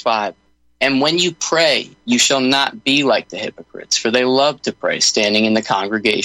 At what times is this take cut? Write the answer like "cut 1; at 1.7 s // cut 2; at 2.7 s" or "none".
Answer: none